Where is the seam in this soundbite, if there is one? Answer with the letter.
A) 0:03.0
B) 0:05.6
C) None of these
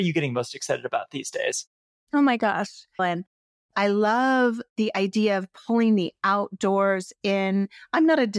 A